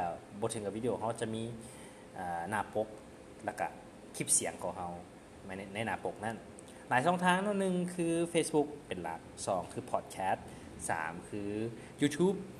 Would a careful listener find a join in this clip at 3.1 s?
no; 0 cuts

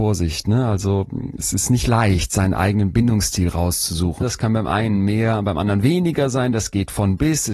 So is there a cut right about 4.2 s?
yes; 1 cut; at 4.2 s

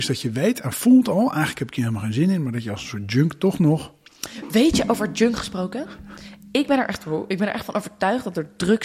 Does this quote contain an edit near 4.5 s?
no; 0 cuts

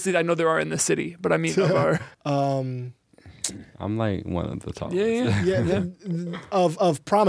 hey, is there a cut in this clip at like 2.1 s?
yes; 1 cut; at 2.1 s

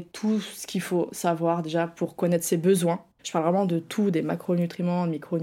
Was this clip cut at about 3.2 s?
yes; 1 cut; at 3.2 s

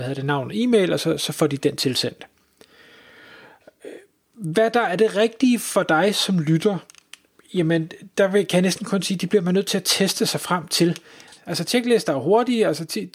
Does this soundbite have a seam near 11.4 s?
yes; 1 cut; at 11.4 s

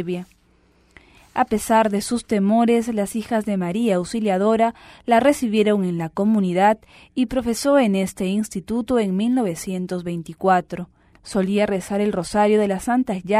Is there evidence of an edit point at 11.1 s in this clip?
yes; 1 cut; at 11.1 s

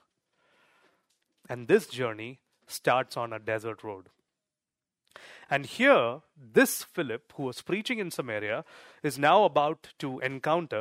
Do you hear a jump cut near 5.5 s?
yes; 1 cut; at 5.5 s

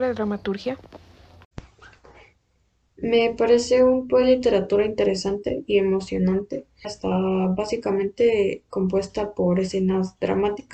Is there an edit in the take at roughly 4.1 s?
yes; 2 cuts; at 4.1 s, 6.8 s

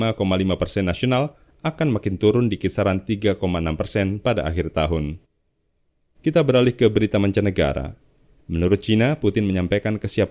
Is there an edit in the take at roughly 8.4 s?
yes; 1 cut; at 8.4 s

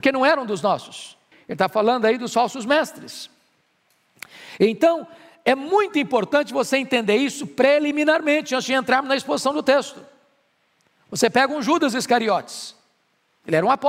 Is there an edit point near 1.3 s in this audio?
yes; 1 cut; at 1.3 s

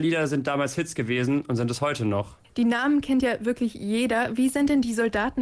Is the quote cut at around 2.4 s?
yes; 1 cut; at 2.4 s

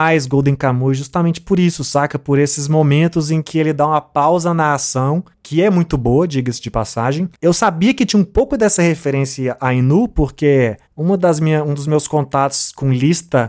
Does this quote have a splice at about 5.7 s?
no; 1 cut; at 7.3 s

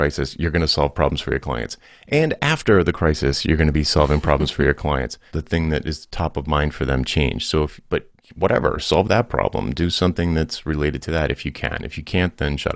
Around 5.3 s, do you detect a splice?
yes; 1 cut; at 5.3 s

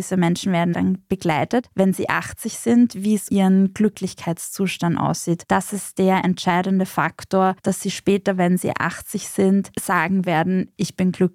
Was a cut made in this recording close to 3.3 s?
yes; 2 cuts; at 3.3 s, 5.4 s

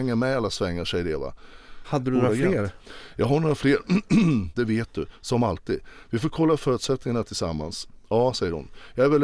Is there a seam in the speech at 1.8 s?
yes; 2 cuts; at 1.8 s, 4.5 s

